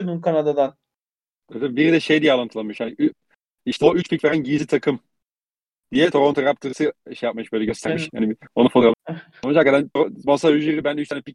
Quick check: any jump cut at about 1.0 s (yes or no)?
no